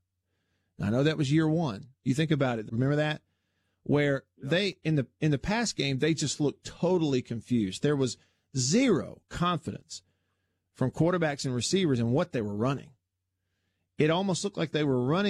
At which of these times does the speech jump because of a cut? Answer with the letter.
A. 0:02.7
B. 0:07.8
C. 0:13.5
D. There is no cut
A